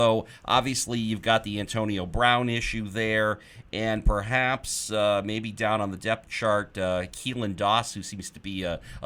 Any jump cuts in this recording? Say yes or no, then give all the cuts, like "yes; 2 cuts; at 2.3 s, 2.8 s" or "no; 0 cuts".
no; 0 cuts